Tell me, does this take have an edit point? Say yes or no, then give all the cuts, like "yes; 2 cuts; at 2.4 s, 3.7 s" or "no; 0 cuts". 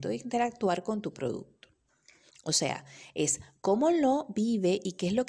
yes; 1 cut; at 2.3 s